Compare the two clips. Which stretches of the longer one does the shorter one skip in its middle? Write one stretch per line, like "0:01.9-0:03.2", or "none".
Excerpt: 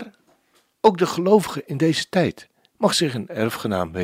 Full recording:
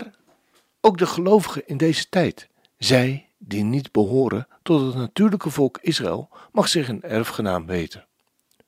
0:02.8-0:06.5